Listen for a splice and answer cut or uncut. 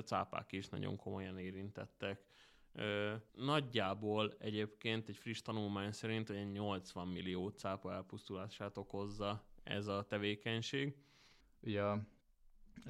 cut